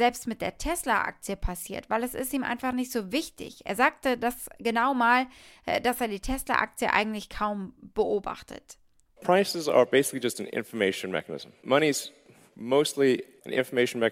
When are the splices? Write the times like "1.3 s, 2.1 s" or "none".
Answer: 9.1 s